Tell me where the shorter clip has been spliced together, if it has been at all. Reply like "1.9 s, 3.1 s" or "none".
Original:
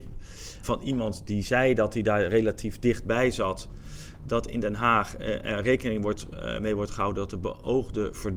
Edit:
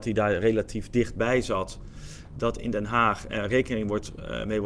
3.3 s